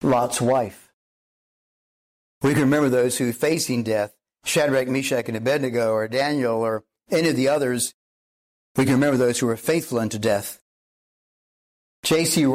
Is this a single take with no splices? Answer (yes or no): no